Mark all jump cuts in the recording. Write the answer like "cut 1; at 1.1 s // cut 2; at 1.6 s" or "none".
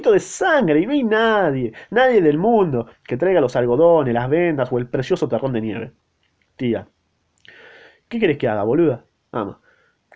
none